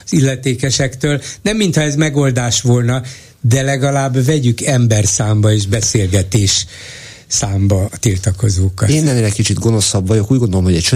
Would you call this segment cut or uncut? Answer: cut